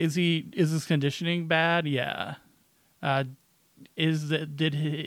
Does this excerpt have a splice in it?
no; 0 cuts

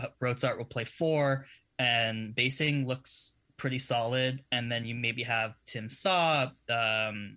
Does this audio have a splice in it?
no; 0 cuts

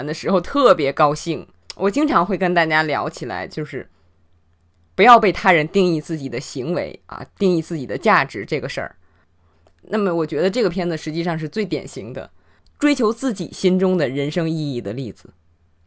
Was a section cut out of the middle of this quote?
yes; 1 cut; at 1.6 s

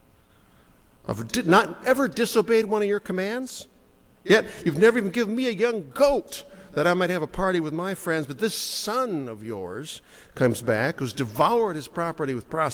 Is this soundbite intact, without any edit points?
yes; 0 cuts

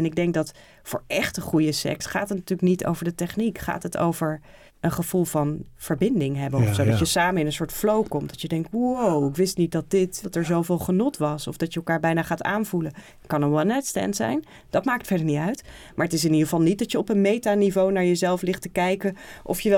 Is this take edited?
yes; 2 cuts; at 4.7 s, 10.2 s

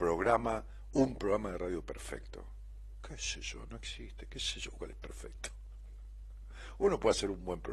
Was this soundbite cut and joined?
no; 0 cuts

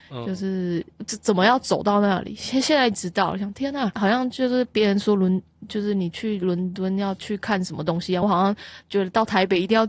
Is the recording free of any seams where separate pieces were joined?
yes; 0 cuts

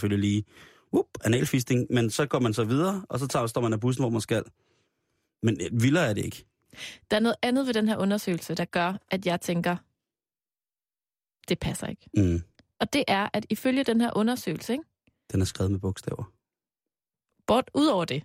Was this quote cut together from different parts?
no; 0 cuts

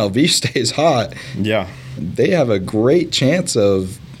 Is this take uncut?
no; 1 cut; at 2.0 s

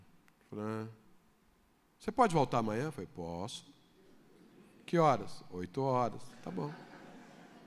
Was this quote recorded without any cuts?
yes; 0 cuts

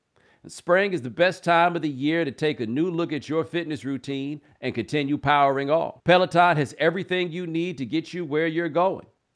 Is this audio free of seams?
no; 2 cuts; at 4.6 s, 6.0 s

